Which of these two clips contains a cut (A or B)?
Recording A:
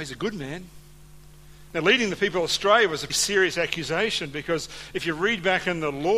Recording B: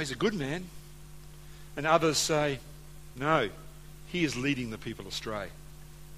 A